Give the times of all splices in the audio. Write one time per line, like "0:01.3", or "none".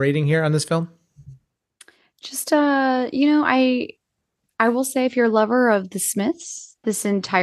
none